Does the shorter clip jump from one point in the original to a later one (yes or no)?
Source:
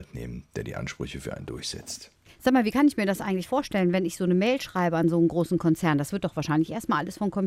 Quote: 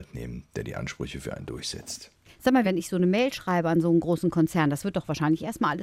yes